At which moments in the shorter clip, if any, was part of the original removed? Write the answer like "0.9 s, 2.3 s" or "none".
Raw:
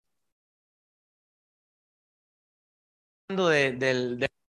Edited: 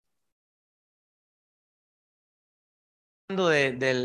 none